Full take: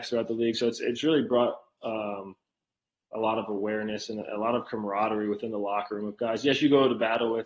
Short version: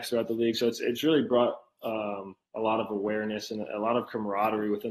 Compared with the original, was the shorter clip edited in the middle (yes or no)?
yes